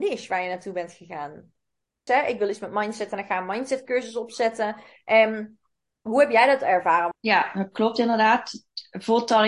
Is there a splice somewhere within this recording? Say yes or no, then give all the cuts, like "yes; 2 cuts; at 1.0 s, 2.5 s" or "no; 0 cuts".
yes; 2 cuts; at 2.1 s, 7.1 s